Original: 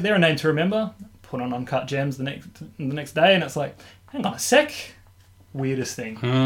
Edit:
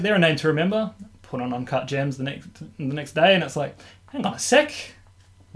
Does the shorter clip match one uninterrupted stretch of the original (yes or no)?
yes